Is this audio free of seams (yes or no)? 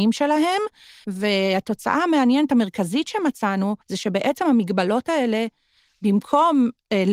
no